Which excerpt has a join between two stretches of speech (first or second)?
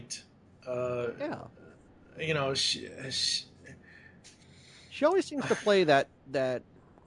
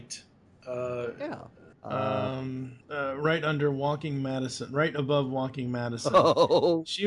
second